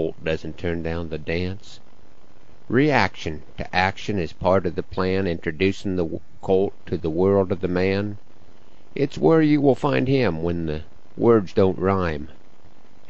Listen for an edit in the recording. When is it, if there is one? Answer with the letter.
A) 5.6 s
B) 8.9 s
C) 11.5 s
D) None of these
C